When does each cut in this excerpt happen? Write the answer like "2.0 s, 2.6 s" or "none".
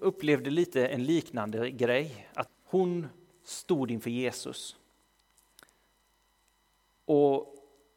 2.5 s